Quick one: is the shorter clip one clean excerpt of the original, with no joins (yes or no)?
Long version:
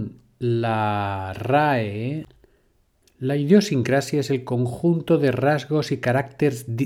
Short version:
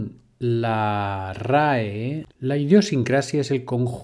no